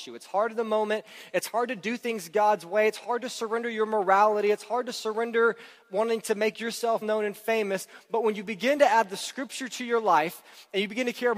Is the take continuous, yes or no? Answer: no